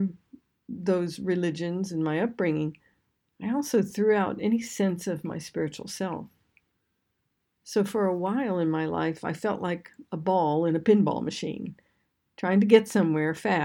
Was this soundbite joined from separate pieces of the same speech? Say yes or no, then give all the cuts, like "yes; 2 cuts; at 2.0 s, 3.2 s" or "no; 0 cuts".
no; 0 cuts